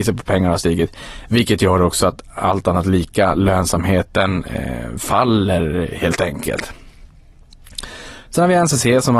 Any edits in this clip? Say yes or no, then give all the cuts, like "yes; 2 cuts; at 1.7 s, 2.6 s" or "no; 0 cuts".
no; 0 cuts